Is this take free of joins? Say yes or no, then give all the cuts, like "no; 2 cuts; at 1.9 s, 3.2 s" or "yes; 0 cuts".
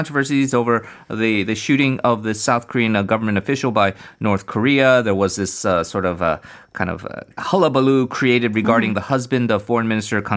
no; 1 cut; at 7.3 s